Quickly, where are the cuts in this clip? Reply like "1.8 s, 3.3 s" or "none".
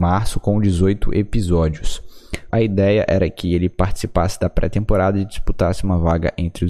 2.5 s